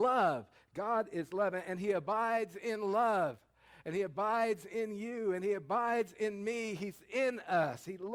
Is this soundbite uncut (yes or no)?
yes